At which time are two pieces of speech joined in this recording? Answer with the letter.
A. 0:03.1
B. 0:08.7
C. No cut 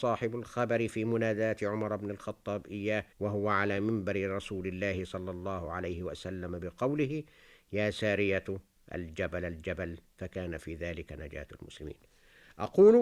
A